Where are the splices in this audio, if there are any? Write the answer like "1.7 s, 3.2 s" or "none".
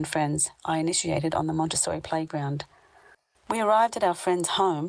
3.3 s